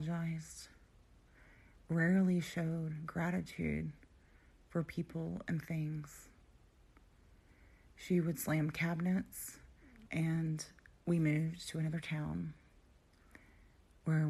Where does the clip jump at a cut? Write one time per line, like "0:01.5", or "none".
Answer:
0:10.1